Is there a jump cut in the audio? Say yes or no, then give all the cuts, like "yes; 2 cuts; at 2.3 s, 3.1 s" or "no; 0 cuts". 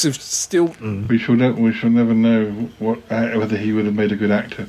no; 0 cuts